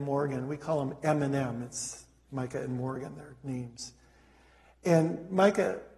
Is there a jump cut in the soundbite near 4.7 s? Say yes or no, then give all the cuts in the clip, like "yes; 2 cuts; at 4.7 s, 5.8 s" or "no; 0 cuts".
no; 0 cuts